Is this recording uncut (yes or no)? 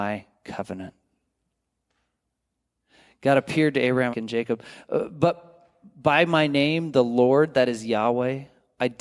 no